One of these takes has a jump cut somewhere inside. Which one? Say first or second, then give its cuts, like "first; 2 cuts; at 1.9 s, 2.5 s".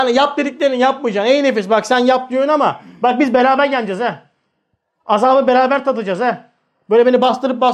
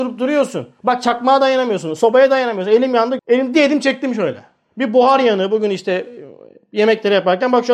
second; 1 cut; at 3.2 s